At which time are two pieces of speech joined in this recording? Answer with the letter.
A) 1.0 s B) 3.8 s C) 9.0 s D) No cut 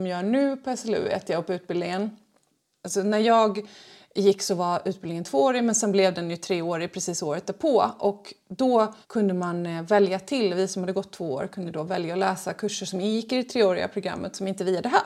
C